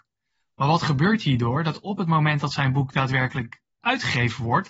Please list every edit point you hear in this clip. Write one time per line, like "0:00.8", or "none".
0:03.8